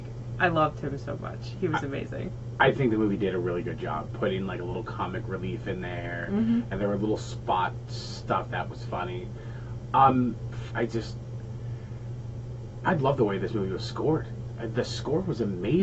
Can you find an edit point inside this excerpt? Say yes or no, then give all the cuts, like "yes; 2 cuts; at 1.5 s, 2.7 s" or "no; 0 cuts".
yes; 1 cut; at 10.7 s